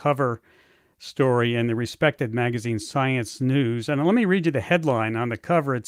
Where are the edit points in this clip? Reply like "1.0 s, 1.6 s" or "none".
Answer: none